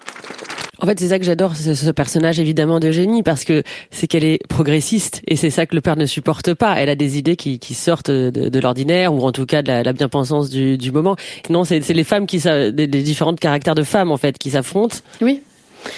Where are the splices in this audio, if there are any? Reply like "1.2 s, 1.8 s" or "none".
11.4 s